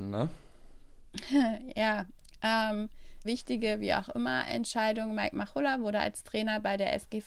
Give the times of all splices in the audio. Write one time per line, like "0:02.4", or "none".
0:03.2

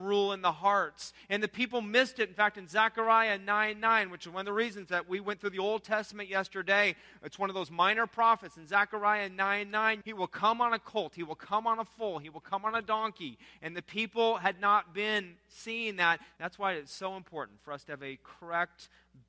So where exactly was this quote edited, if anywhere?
0:10.0
0:16.4

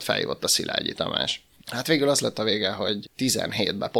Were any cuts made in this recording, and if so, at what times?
0:01.6
0:03.0

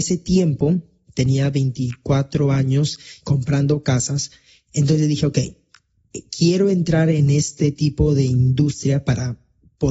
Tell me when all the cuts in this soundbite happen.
0:03.2

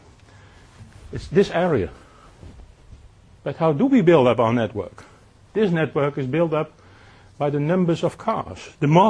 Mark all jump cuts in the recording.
0:03.4

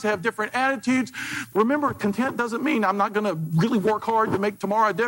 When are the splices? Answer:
0:01.5

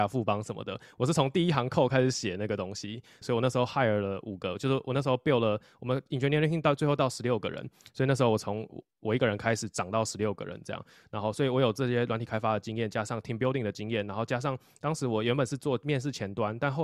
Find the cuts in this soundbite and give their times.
0:03.2

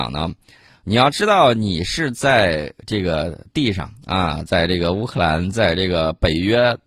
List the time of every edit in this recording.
none

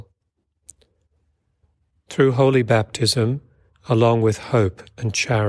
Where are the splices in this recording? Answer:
0:03.7

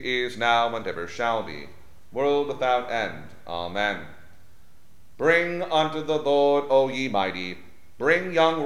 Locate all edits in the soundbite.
none

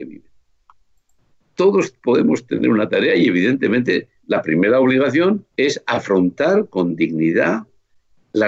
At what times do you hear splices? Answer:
0:01.3
0:05.5

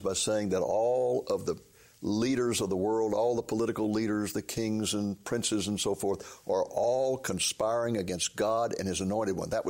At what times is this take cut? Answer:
none

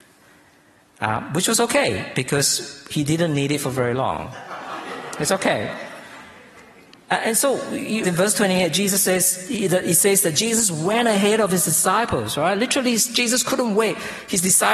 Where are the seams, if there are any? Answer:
0:08.0

